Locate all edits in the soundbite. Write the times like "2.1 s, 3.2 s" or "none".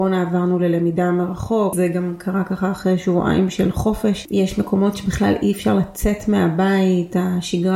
1.7 s